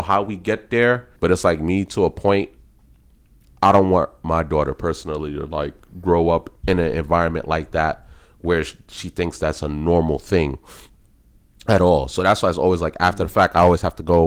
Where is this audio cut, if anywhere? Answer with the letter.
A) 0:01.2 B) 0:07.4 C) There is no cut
A